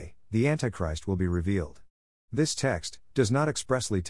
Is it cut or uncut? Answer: cut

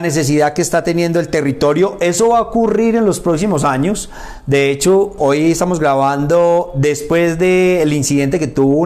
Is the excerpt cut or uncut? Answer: cut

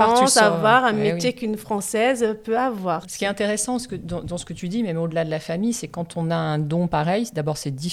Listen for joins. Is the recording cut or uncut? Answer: cut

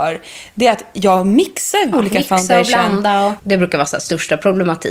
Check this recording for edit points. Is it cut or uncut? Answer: cut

